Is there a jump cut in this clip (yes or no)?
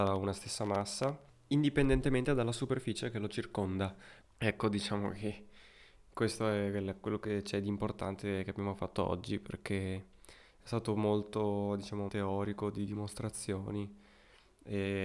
yes